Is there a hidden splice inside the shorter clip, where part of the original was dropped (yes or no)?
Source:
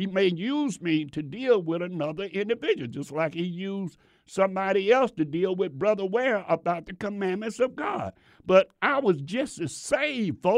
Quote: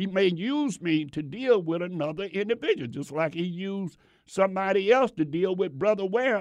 no